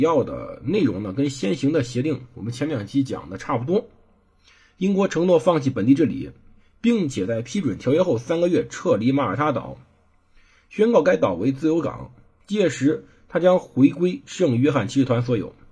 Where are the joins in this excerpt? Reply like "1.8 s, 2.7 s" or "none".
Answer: none